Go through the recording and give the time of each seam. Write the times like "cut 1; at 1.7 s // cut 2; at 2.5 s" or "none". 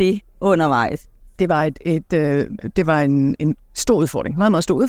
none